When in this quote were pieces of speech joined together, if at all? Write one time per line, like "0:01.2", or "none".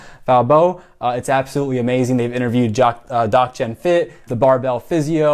0:04.3